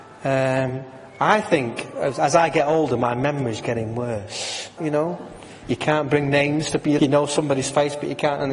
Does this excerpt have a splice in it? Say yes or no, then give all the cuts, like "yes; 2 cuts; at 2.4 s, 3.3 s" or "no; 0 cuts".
yes; 2 cuts; at 4.8 s, 7.0 s